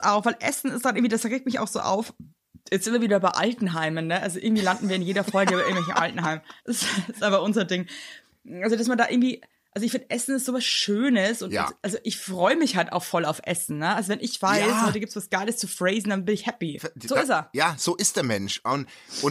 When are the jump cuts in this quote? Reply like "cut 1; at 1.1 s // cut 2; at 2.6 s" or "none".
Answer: cut 1; at 6.6 s // cut 2; at 16.8 s